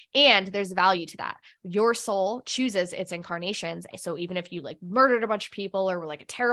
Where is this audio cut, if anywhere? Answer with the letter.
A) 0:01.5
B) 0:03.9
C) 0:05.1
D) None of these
B